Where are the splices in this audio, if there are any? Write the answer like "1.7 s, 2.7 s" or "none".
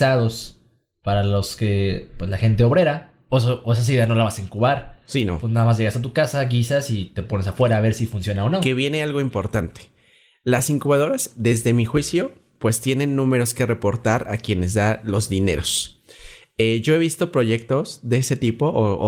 3.3 s